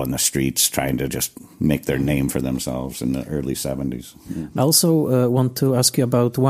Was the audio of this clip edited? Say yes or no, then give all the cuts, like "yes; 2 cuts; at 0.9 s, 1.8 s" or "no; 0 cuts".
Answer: yes; 1 cut; at 4.6 s